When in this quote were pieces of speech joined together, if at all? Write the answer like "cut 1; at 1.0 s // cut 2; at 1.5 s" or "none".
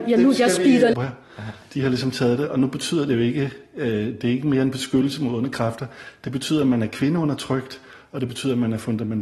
cut 1; at 0.9 s

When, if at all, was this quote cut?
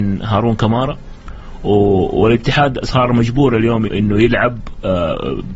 cut 1; at 3.9 s

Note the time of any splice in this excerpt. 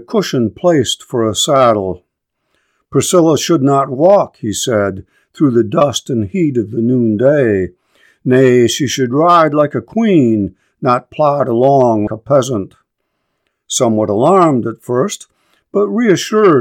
cut 1; at 12.1 s

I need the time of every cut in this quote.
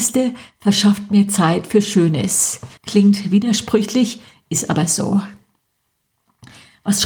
cut 1; at 2.8 s

